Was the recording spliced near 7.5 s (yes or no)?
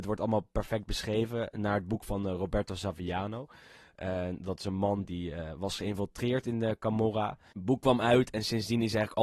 yes